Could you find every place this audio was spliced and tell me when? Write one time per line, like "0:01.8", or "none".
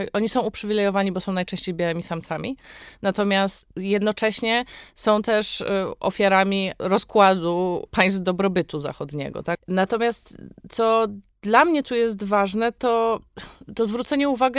0:09.5